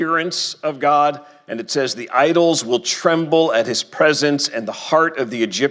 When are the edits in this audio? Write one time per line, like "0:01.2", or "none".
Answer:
none